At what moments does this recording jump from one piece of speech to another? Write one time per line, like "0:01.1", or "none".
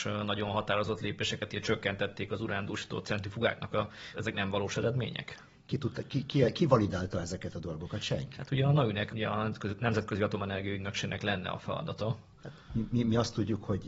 0:04.1
0:09.1